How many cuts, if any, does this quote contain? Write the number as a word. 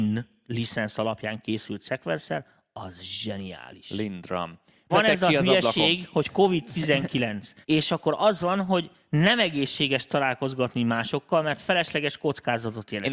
two